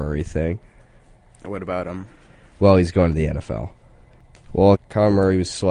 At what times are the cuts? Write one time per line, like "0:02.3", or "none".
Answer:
0:04.7